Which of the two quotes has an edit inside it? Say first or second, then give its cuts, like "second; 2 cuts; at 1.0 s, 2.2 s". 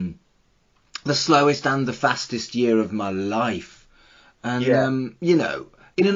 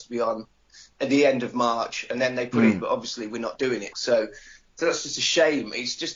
second; 2 cuts; at 2.8 s, 3.9 s